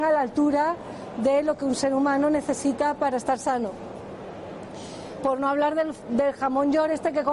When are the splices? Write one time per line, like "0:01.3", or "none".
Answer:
none